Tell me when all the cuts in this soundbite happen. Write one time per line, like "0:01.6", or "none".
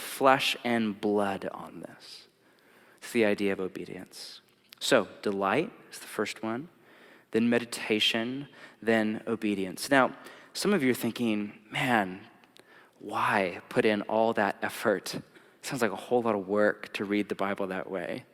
none